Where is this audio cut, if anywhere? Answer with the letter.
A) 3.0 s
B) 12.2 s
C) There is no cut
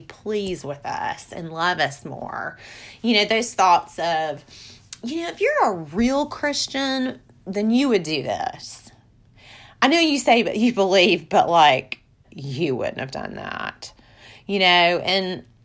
B